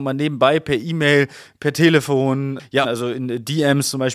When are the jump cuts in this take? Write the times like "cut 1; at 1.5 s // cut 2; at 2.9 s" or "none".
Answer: cut 1; at 2.8 s